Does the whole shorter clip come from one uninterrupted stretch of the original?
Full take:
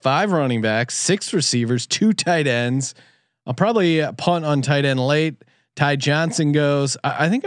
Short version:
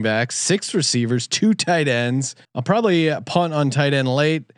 no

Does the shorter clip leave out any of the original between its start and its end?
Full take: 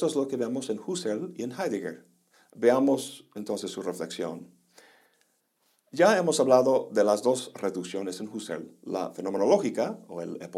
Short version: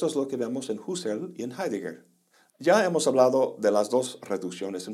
yes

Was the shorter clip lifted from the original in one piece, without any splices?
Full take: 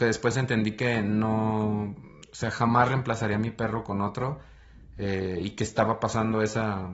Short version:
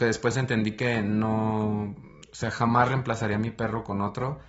yes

